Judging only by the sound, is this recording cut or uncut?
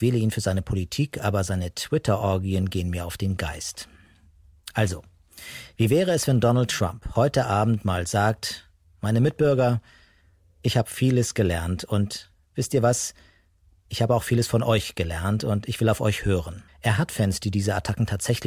cut